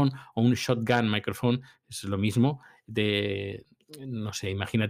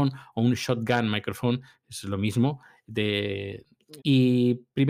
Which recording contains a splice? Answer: second; 1 cut; at 4.0 s

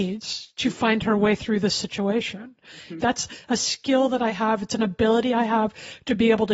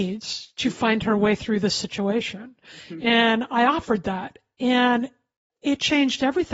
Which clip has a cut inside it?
first; 1 cut; at 3.0 s

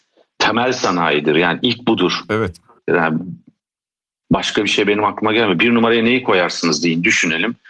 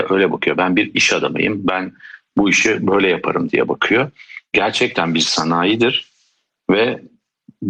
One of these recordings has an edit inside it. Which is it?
first; 1 cut; at 2.9 s

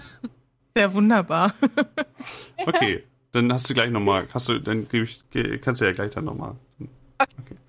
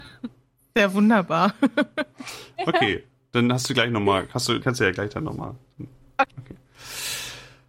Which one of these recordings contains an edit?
second; 1 cut; at 4.6 s

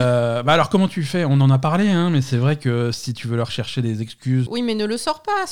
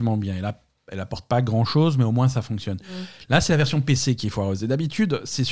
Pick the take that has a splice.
first; 1 cut; at 4.5 s

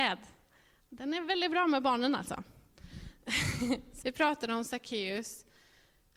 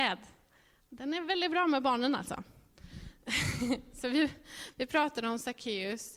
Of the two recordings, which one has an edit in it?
first; 1 cut; at 4.0 s

